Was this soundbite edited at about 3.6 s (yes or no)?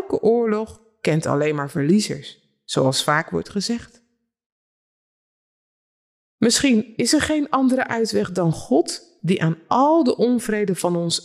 no